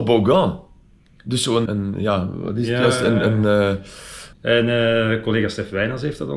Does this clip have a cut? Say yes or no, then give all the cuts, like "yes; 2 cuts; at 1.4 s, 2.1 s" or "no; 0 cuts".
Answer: yes; 2 cuts; at 1.7 s, 4.3 s